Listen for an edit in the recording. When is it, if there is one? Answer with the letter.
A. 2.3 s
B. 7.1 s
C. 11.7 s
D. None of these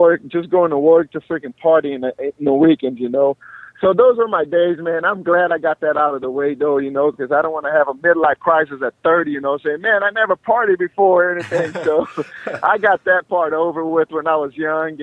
D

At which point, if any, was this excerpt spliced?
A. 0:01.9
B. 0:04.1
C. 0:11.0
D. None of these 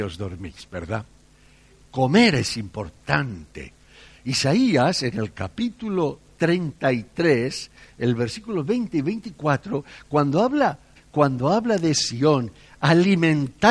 C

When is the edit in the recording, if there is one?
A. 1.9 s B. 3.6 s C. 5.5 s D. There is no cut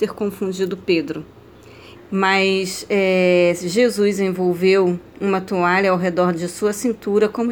A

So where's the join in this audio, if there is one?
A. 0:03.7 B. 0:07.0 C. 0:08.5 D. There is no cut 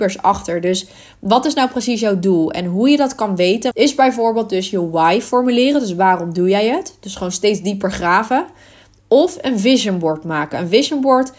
A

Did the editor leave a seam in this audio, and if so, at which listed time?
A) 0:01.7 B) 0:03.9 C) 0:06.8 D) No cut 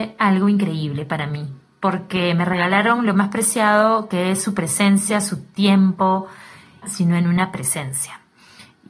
C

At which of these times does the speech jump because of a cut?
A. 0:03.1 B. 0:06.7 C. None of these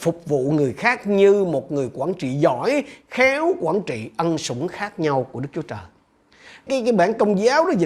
B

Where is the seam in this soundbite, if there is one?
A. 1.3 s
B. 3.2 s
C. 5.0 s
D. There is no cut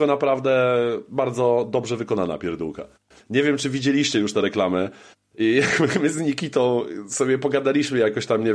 B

